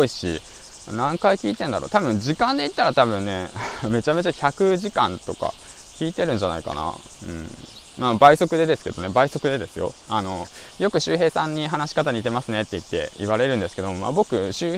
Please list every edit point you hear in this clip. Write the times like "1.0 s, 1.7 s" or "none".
10.1 s